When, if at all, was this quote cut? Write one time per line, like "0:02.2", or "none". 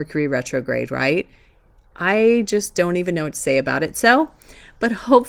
none